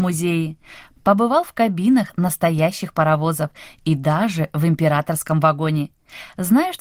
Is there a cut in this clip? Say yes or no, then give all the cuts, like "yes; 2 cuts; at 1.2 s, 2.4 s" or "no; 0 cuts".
yes; 1 cut; at 1.0 s